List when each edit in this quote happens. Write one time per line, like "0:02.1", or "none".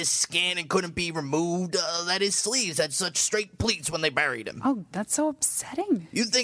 0:04.9